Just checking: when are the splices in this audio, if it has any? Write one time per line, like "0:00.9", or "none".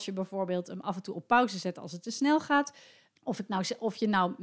0:03.2